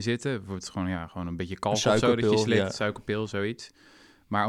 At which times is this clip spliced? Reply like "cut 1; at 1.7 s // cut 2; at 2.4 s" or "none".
none